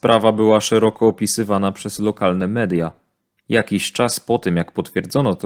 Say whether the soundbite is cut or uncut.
uncut